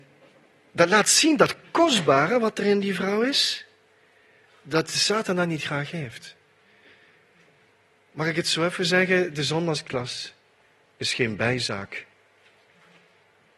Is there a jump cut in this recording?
no; 0 cuts

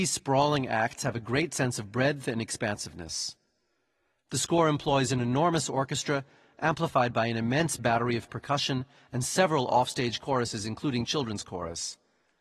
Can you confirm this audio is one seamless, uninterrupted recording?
yes; 0 cuts

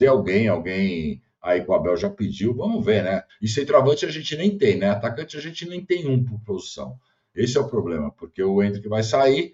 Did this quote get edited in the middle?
yes; 1 cut; at 3.3 s

